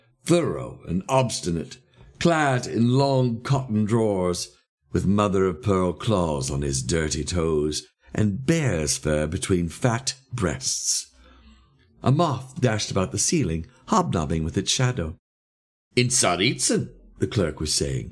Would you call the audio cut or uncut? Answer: uncut